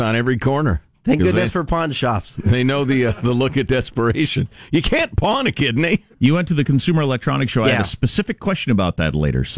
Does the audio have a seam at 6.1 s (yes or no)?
yes